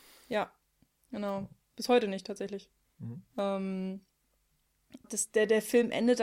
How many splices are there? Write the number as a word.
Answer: two